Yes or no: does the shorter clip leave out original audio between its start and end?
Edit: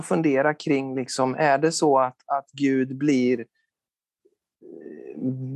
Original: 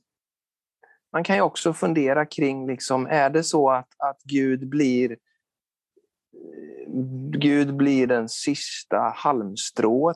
no